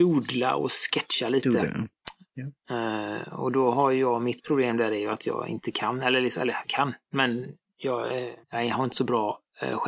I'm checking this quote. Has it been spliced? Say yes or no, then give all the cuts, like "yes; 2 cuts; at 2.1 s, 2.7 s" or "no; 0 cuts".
yes; 1 cut; at 8.4 s